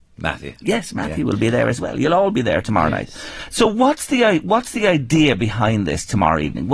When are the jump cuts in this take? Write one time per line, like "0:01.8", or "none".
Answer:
none